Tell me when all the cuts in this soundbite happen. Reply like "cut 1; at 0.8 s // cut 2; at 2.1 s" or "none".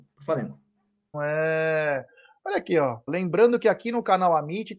cut 1; at 1.1 s // cut 2; at 3.1 s